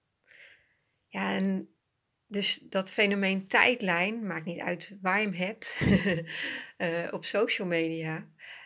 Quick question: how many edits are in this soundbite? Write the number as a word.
zero